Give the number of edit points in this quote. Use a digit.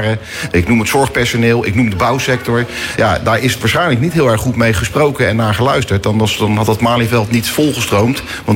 0